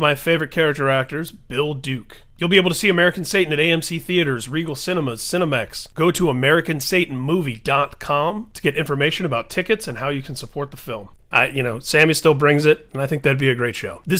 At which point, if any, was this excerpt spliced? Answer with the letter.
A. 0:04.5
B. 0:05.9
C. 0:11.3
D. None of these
C